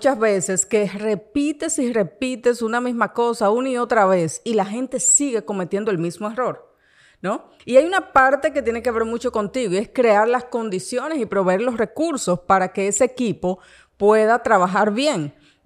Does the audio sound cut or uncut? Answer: cut